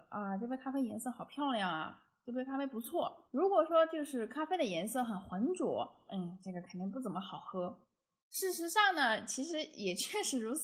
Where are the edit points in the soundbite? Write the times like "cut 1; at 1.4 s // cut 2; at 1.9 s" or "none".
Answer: cut 1; at 6.1 s